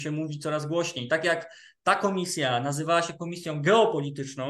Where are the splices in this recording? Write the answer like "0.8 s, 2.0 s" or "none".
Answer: none